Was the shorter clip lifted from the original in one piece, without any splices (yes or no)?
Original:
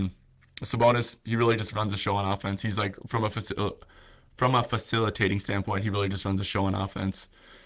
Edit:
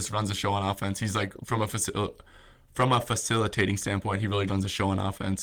no